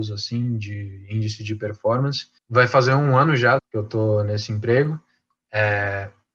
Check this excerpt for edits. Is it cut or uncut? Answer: cut